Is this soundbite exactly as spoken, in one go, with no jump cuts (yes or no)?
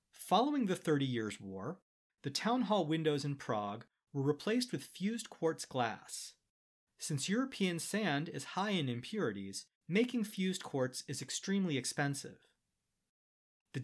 no